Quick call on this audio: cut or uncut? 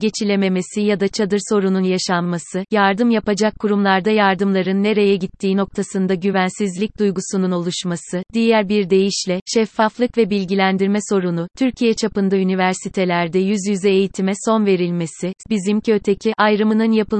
cut